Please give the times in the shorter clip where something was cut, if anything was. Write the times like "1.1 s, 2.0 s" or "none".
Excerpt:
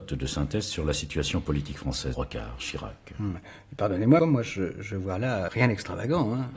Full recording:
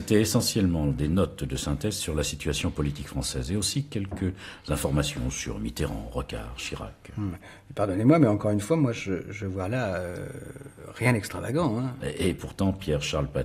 2.1 s, 4.2 s, 5.5 s